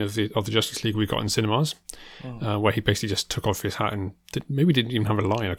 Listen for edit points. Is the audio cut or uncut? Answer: uncut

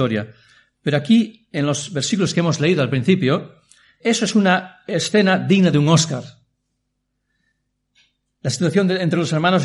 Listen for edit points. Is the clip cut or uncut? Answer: cut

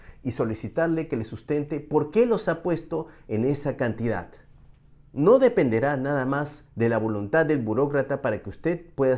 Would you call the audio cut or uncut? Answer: cut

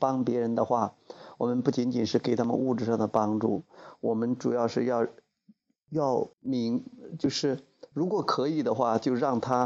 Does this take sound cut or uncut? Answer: cut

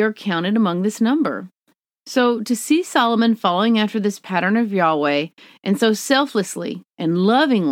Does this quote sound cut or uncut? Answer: uncut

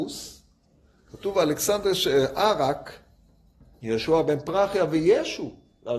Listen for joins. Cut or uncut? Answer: uncut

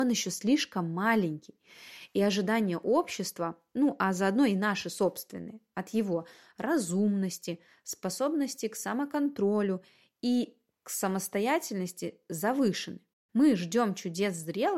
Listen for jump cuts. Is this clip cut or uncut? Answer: uncut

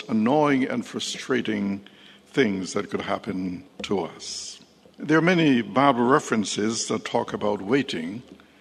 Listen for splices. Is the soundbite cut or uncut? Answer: cut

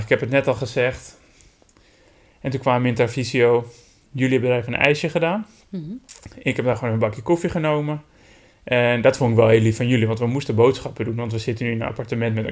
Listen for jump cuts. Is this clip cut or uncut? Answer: uncut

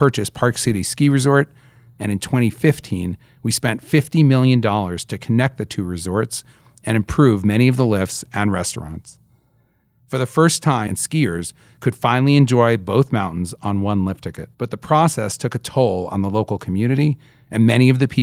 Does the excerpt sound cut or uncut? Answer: cut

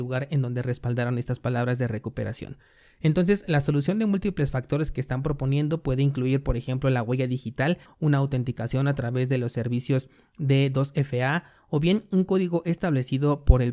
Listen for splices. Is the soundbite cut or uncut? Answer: cut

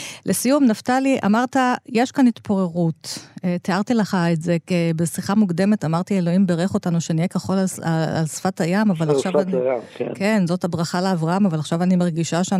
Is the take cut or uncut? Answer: uncut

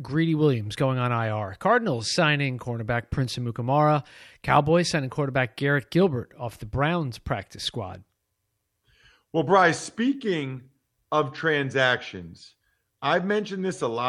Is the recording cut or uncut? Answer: uncut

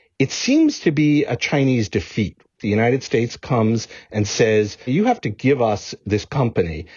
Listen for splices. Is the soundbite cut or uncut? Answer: cut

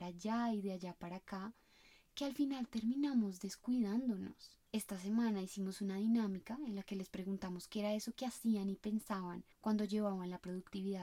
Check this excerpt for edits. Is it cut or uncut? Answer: cut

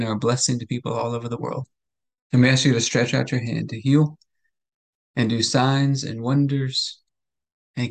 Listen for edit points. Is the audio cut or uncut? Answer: cut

